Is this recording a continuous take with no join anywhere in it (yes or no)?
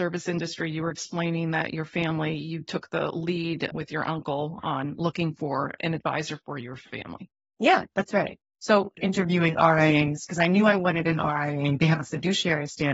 no